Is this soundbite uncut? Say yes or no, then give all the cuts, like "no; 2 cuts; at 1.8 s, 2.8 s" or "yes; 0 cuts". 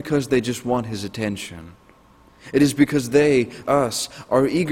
no; 1 cut; at 3.6 s